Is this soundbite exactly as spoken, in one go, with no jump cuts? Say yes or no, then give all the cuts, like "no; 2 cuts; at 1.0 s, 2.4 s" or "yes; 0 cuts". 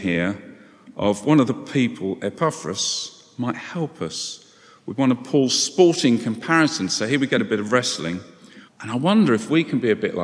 no; 1 cut; at 8.7 s